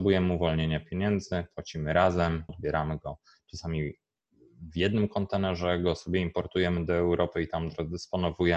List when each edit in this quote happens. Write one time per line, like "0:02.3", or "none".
0:02.5